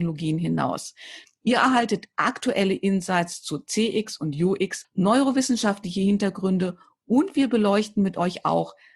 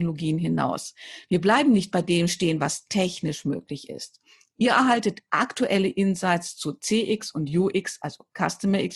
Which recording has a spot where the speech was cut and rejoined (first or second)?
first